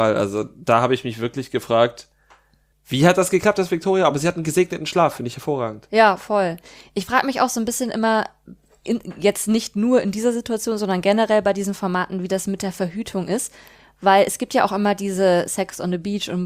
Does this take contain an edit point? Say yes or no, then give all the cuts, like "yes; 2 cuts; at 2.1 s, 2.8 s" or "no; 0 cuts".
no; 0 cuts